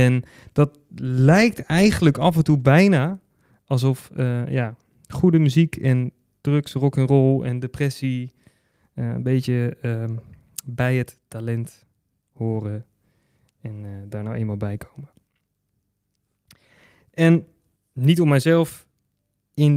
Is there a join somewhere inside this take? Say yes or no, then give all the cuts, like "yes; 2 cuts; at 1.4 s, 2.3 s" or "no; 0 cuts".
no; 0 cuts